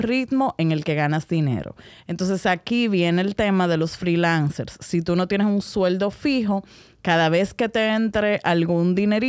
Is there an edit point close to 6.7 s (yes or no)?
no